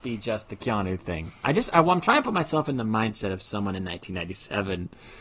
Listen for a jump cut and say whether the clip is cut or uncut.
uncut